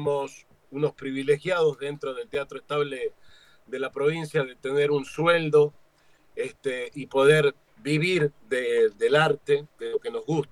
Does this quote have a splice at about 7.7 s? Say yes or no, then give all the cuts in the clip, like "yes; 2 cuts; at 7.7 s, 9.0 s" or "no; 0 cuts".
yes; 2 cuts; at 7.7 s, 9.0 s